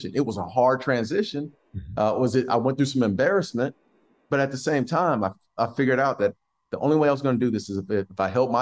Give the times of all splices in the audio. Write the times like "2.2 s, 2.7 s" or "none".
none